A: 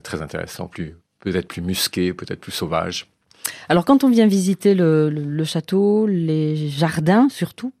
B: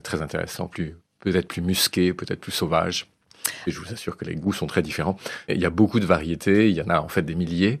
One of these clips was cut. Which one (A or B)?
B